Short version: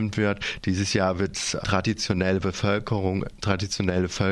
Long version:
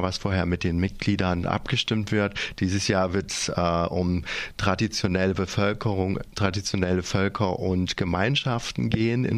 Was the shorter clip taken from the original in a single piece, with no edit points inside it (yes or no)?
no